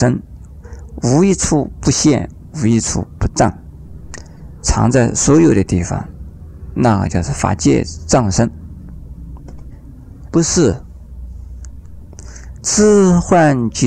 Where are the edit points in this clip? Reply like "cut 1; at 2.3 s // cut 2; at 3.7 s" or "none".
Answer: cut 1; at 10.3 s // cut 2; at 12.6 s